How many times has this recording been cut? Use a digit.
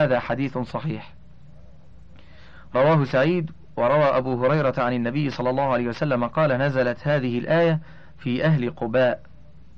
0